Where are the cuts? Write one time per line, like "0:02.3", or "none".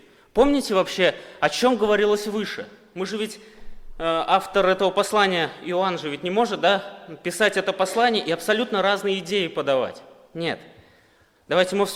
none